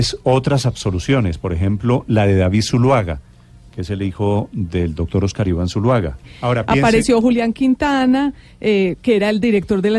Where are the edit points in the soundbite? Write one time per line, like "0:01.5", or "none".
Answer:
0:06.2